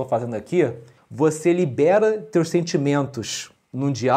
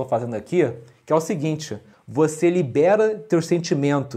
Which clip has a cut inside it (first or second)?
first